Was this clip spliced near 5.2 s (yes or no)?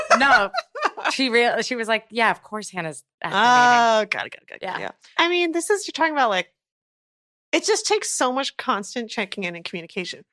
yes